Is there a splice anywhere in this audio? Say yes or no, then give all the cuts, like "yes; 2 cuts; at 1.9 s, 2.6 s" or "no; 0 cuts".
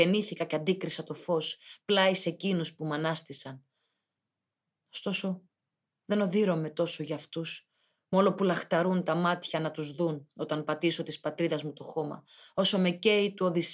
no; 0 cuts